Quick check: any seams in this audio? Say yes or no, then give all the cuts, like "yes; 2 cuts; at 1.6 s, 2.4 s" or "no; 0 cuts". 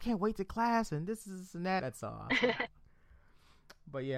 yes; 1 cut; at 1.8 s